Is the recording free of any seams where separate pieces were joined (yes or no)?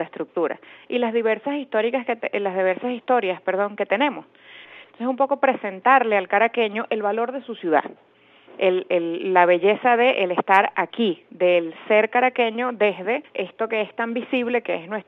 no